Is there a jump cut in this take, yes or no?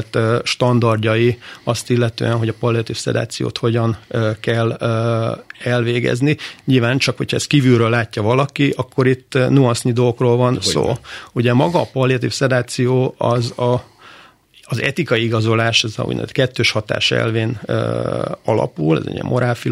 no